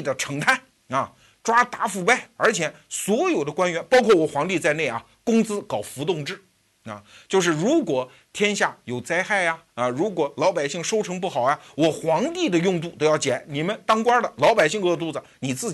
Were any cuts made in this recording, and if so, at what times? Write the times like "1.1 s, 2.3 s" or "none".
none